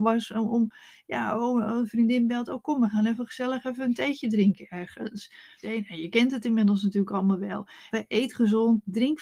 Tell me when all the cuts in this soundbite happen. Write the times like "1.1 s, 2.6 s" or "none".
5.6 s, 7.9 s